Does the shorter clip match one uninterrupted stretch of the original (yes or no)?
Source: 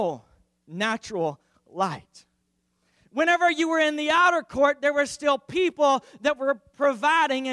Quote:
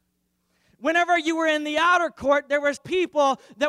no